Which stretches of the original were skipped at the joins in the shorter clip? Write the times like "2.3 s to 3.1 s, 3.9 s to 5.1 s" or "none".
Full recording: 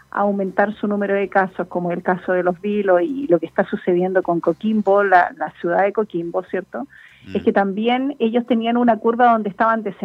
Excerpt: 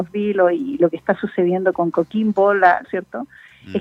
5.3 s to 6.4 s